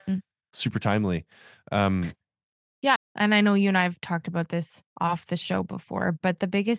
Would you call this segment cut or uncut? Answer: cut